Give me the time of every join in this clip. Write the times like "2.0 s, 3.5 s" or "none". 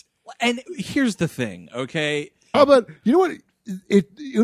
2.5 s